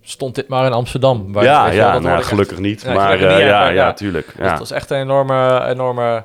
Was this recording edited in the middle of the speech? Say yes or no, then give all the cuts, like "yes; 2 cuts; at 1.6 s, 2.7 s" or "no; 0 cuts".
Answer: no; 0 cuts